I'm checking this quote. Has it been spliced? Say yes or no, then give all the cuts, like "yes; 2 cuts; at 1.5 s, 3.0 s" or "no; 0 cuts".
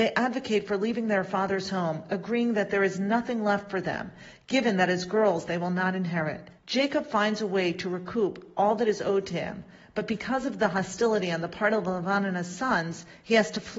yes; 1 cut; at 6.6 s